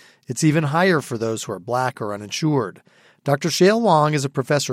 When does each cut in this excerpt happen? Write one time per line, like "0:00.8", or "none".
0:01.9